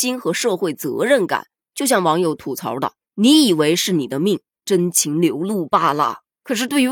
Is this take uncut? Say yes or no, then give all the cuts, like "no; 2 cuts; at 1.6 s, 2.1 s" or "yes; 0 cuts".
no; 2 cuts; at 1.6 s, 4.5 s